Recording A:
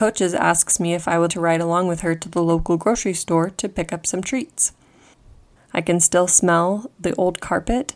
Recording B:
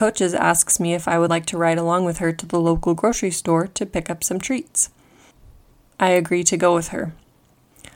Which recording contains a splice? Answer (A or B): A